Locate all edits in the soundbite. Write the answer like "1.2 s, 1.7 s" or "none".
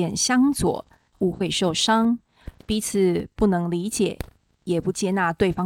1.1 s